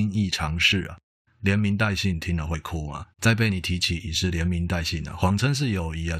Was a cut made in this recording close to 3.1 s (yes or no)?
yes